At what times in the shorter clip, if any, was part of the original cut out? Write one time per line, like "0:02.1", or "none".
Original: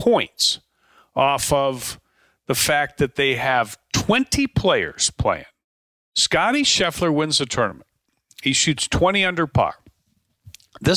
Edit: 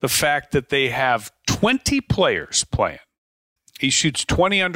0:03.6